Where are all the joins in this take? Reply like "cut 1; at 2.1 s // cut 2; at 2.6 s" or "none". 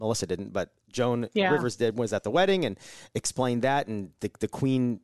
none